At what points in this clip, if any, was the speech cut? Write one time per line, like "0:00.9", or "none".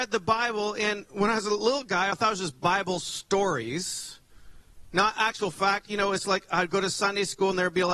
0:02.1